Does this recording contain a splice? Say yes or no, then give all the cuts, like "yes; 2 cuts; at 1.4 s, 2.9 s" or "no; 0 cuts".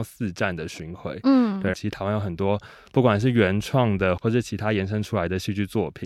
yes; 2 cuts; at 1.7 s, 4.2 s